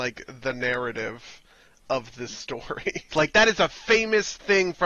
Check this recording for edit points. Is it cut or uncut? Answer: cut